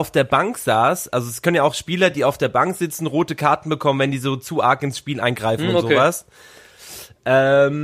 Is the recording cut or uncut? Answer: uncut